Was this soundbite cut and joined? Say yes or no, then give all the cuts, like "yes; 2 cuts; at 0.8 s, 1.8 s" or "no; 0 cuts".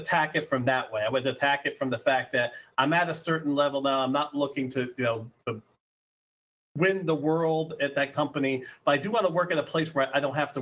no; 0 cuts